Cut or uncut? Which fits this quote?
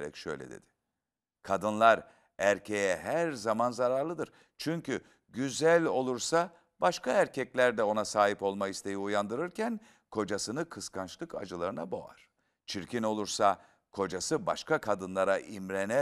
cut